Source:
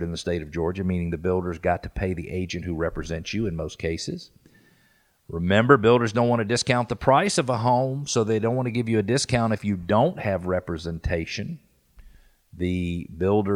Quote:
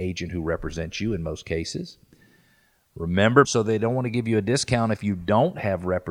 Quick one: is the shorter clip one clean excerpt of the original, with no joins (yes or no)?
no